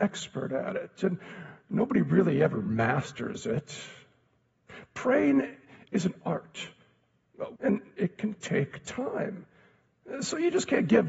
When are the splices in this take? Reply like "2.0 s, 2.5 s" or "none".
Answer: 7.6 s